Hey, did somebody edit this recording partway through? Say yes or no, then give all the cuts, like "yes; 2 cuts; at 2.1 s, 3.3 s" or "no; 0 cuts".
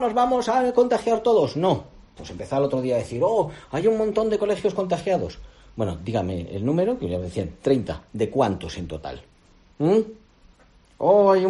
yes; 1 cut; at 2.2 s